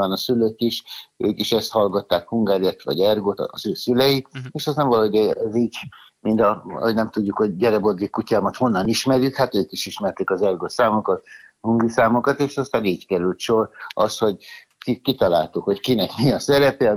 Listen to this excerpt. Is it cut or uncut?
uncut